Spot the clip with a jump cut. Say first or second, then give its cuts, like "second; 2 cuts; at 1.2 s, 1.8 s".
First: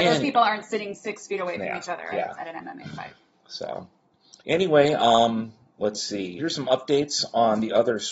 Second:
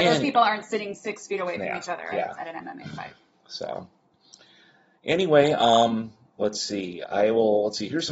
first; 2 cuts; at 4.4 s, 6.4 s